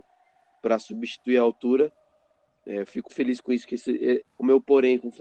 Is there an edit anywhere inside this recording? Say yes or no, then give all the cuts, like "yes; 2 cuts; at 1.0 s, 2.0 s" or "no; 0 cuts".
yes; 2 cuts; at 3.1 s, 4.2 s